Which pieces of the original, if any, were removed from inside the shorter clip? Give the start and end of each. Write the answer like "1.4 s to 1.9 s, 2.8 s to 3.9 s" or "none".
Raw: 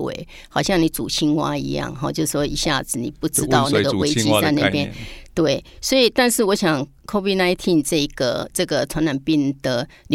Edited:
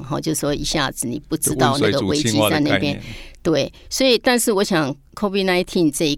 none